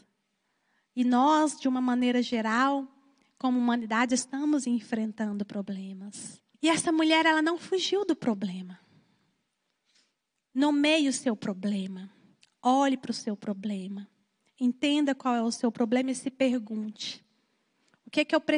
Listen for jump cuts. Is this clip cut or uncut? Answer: cut